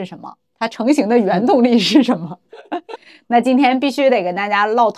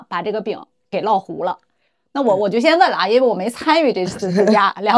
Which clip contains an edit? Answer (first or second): first